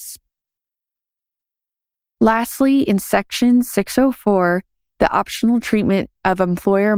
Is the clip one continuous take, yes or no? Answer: yes